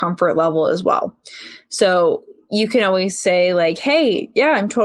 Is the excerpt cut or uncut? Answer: uncut